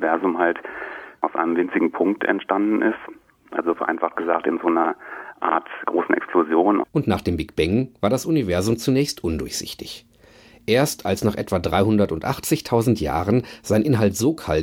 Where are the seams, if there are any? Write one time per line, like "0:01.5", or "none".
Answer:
0:06.8